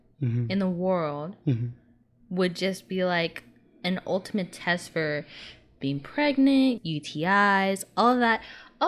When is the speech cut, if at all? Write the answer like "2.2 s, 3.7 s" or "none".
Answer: 6.8 s